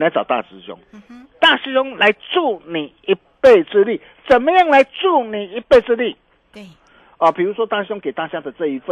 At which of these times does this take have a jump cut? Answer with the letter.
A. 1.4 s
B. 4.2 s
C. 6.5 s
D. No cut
C